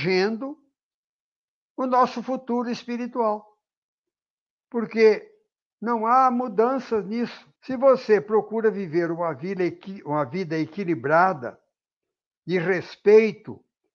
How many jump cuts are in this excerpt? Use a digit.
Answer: 1